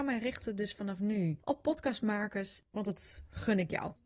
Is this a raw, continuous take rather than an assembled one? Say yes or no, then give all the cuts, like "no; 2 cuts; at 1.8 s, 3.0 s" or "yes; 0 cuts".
no; 1 cut; at 2.6 s